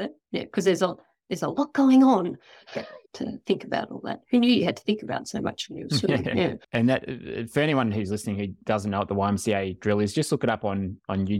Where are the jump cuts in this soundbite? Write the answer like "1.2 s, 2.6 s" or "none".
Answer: 3.0 s